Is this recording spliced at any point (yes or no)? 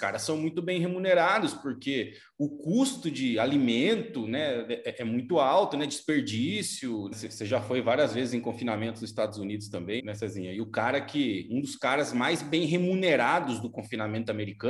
yes